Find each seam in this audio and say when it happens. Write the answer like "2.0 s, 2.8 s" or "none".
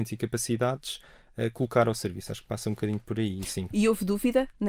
3.7 s